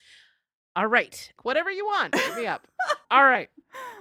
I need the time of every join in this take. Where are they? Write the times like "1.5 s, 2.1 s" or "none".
1.4 s, 3.0 s